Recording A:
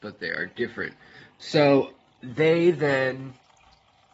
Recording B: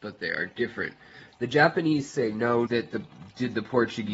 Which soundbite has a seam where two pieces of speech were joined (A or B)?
B